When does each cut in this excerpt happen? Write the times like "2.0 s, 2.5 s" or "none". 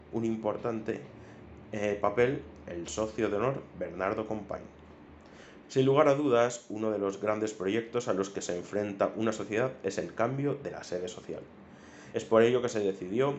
5.6 s, 12.1 s

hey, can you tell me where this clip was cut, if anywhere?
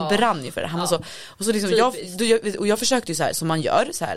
none

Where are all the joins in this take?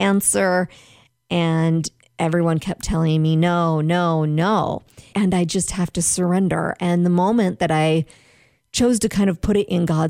5.1 s

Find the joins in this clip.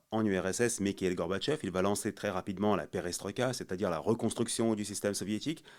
none

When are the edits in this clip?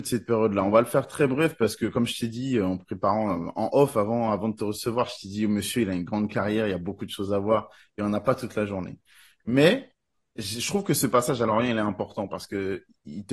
none

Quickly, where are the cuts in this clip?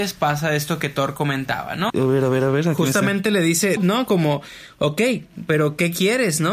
1.9 s, 3.8 s

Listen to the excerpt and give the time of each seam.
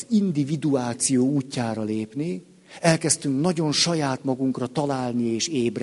none

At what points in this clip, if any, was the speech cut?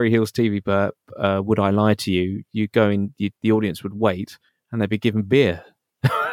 3.3 s

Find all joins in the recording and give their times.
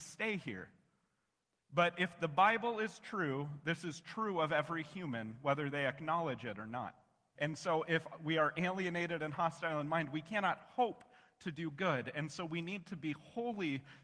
7.4 s

